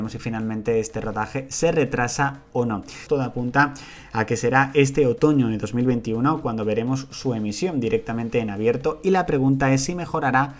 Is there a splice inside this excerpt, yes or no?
yes